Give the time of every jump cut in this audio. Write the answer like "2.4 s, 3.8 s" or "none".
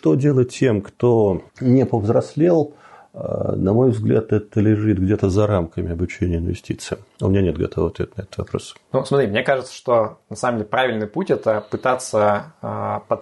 1.5 s